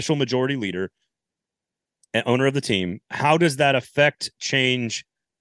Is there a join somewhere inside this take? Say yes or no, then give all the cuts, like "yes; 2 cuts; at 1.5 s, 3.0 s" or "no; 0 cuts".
no; 0 cuts